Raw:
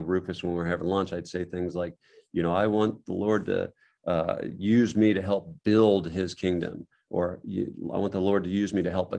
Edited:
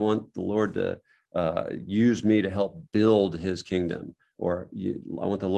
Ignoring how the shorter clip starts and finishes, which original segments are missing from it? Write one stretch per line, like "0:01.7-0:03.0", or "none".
none

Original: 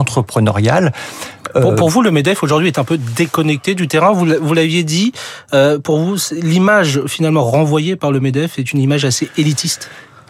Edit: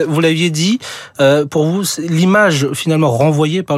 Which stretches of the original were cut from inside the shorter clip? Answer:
none

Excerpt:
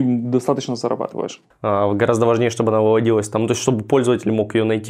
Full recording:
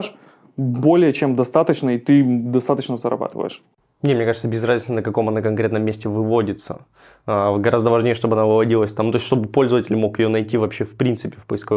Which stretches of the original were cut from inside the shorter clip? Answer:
0:03.7-0:07.1

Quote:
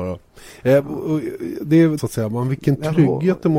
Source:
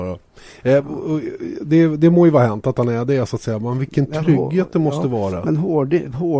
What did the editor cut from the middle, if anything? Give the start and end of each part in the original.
0:02.0-0:03.3

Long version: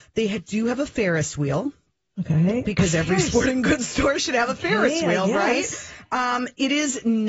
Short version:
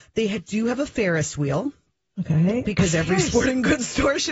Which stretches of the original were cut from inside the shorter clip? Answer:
none

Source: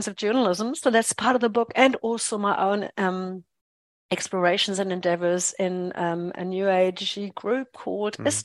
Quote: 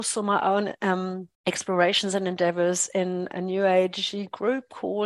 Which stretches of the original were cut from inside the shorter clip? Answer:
0:03.5-0:04.0
0:05.9-0:06.3

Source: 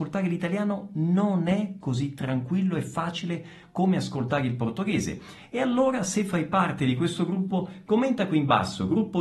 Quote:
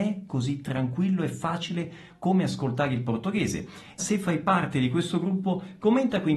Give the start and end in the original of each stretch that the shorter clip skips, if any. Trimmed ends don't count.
0:05.5-0:06.0

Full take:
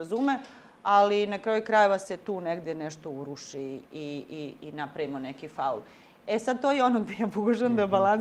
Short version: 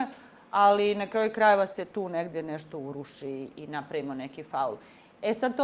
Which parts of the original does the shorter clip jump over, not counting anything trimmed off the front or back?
0:03.8-0:04.6

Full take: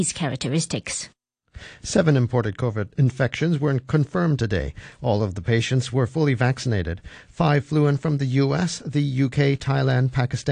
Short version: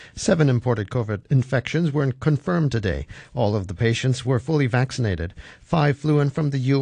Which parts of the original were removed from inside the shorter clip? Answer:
none

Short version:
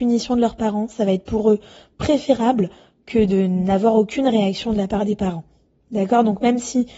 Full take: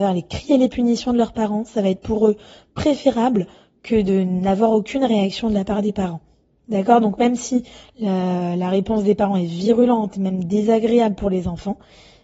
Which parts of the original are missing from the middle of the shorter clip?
none

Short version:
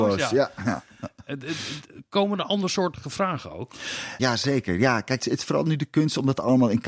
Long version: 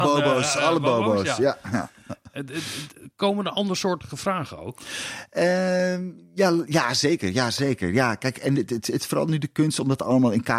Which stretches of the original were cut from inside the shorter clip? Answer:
0:05.3-0:07.3
0:08.3-0:08.8

